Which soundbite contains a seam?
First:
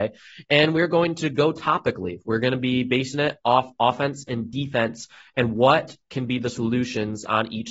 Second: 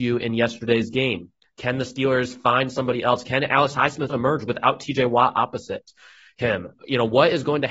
second; 1 cut; at 4.1 s

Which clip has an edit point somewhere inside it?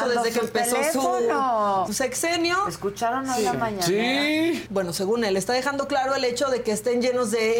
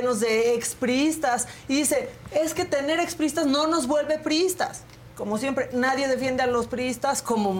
first; 2 cuts; at 1.9 s, 4.7 s

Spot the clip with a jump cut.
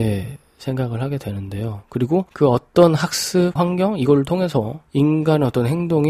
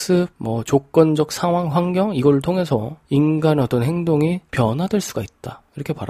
first; 2 cuts; at 1.8 s, 3.6 s

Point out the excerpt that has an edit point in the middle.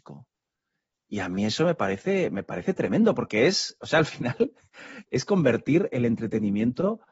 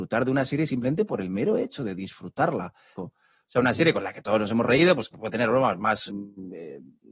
second; 2 cuts; at 3.0 s, 6.1 s

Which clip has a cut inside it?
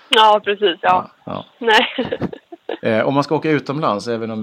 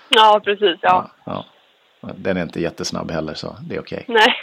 first; 2 cuts; at 1.6 s, 2.8 s

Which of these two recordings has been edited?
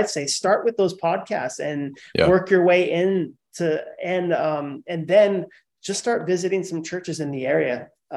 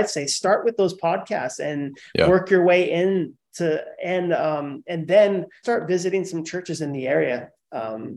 second; 1 cut; at 5.6 s

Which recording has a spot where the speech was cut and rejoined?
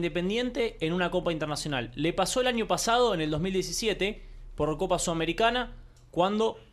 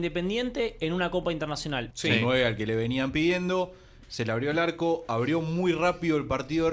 second; 1 cut; at 1.9 s

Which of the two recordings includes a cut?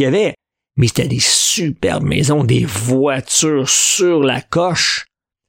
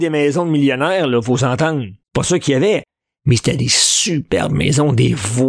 second; 1 cut; at 2.0 s

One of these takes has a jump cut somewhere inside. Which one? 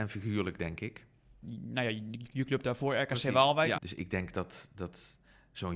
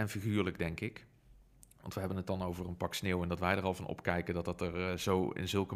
first; 2 cuts; at 1.4 s, 3.8 s

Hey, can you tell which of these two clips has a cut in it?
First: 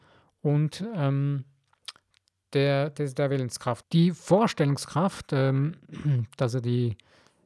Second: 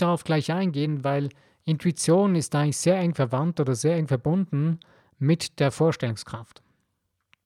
first; 1 cut; at 3.8 s

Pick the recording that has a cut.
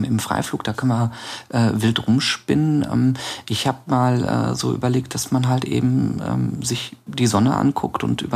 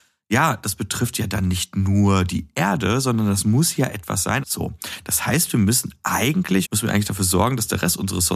second; 2 cuts; at 4.4 s, 6.6 s

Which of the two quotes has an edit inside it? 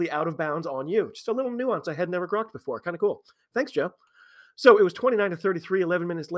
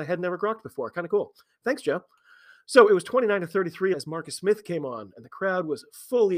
second; 1 cut; at 3.9 s

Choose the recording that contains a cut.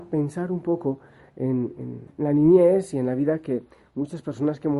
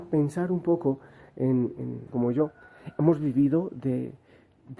second; 1 cut; at 2.1 s

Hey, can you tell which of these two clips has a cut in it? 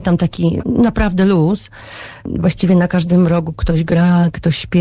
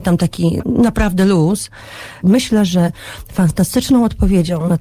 second; 1 cut; at 2.2 s

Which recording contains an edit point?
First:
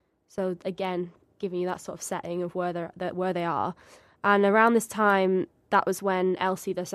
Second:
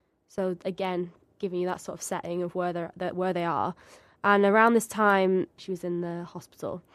second; 1 cut; at 5.6 s

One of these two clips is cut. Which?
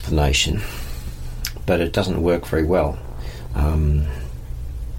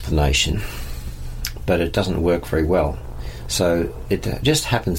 first; 1 cut; at 3.5 s

